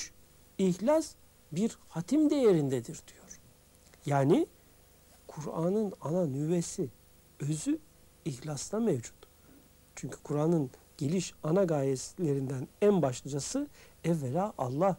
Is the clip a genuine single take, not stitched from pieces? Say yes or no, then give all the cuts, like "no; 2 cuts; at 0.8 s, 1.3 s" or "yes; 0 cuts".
yes; 0 cuts